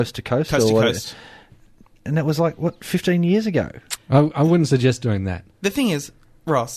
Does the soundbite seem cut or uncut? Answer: cut